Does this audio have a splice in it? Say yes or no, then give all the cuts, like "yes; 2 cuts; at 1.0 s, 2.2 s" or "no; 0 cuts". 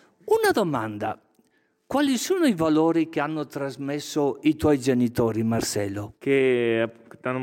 yes; 1 cut; at 6.1 s